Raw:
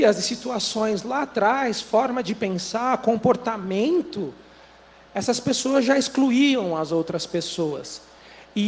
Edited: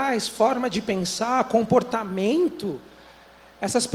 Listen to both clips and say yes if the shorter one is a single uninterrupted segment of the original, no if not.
yes